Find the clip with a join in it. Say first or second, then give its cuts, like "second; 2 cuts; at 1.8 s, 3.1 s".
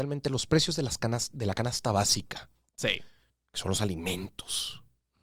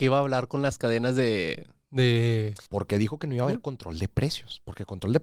second; 1 cut; at 2.7 s